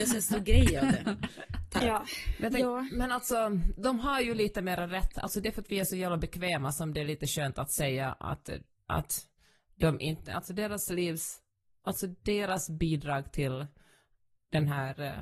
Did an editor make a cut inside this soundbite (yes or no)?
yes